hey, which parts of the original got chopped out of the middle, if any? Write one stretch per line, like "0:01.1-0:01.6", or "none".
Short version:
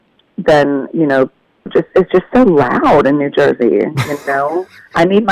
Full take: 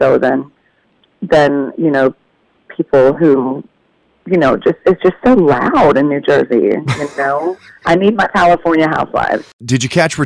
0:02.5-0:04.6